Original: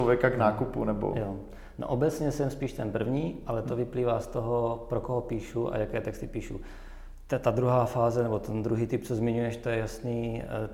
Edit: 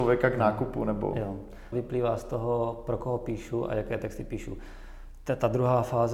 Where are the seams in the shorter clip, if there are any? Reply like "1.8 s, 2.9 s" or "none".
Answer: 1.7 s